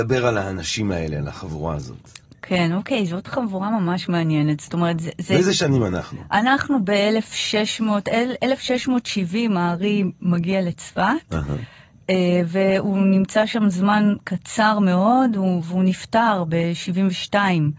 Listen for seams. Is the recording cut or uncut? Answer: uncut